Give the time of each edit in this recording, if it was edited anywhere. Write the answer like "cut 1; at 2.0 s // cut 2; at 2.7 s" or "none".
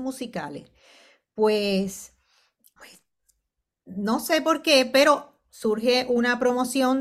cut 1; at 2.8 s